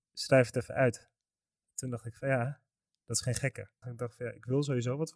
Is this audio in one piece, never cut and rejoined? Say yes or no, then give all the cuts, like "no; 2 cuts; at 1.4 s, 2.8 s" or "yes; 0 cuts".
no; 1 cut; at 3.8 s